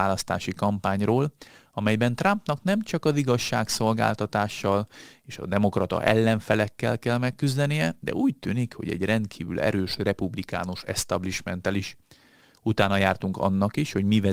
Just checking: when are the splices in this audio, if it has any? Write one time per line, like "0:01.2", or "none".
none

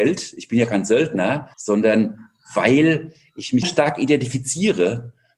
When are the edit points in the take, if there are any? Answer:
0:01.5
0:03.6

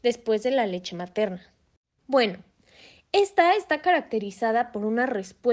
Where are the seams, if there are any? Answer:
0:02.0

